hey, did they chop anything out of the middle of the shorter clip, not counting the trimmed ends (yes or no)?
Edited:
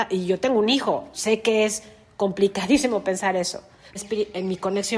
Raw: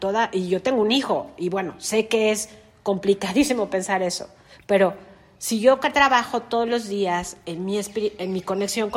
yes